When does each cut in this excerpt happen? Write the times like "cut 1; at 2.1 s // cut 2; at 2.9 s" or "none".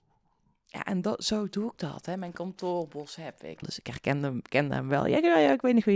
cut 1; at 3.6 s